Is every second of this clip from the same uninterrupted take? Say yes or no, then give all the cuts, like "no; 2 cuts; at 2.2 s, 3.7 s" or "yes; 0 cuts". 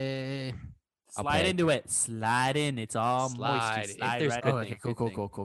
no; 1 cut; at 4.4 s